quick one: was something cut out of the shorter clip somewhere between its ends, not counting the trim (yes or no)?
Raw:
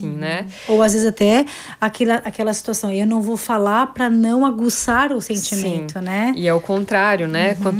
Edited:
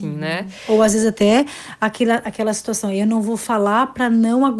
no